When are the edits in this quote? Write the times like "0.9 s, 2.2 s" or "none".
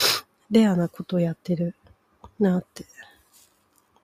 none